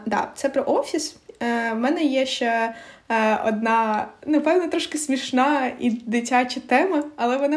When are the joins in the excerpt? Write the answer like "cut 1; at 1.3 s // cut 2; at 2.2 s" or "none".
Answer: none